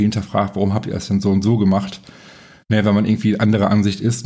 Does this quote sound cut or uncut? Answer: uncut